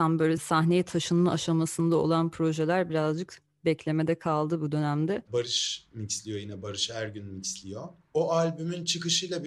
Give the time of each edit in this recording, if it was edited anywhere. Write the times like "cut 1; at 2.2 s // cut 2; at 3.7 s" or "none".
cut 1; at 5.2 s